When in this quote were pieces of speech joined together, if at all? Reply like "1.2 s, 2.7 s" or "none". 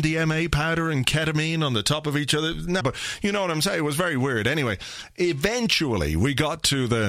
2.8 s